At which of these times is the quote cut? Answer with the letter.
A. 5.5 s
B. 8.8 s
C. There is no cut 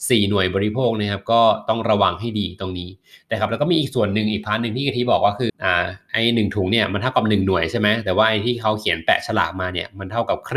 A